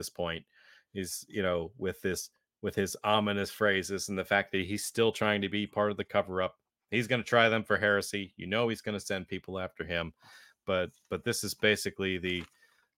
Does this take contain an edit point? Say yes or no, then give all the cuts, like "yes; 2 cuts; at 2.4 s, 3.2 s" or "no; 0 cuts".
no; 0 cuts